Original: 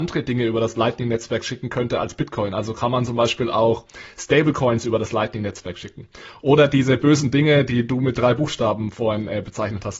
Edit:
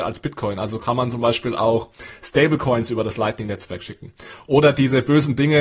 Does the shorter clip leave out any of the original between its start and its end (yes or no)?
no